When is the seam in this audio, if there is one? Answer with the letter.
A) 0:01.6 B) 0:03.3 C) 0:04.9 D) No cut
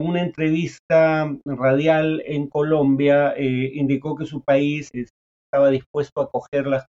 C